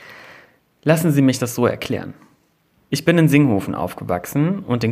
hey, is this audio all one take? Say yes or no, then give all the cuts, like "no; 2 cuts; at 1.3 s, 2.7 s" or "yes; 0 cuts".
no; 1 cut; at 2.8 s